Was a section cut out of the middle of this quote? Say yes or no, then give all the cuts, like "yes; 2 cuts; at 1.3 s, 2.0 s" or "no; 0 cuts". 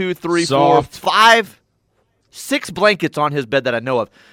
no; 0 cuts